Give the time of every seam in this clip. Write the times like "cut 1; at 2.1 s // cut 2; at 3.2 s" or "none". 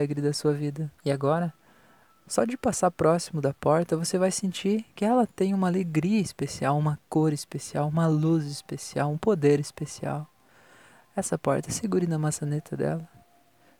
cut 1; at 1.0 s